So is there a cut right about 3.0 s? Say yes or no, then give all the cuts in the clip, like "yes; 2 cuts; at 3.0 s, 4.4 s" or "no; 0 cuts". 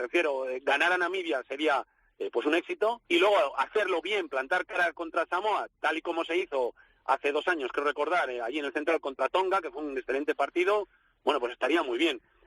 yes; 1 cut; at 3.0 s